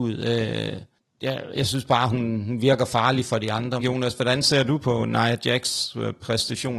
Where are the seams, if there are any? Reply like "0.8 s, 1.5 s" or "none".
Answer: 3.8 s